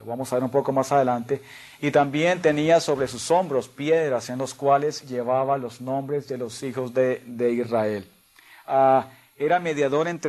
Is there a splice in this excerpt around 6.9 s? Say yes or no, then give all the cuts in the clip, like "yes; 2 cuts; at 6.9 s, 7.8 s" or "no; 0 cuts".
no; 0 cuts